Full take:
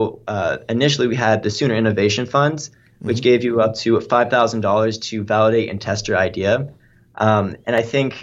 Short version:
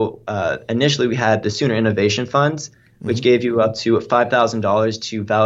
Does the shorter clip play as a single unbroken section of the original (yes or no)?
yes